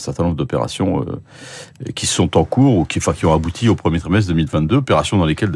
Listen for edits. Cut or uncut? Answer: uncut